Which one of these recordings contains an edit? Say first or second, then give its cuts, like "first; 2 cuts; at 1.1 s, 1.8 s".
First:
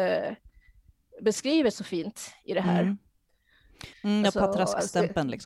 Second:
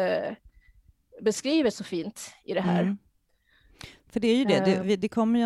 first; 1 cut; at 3.9 s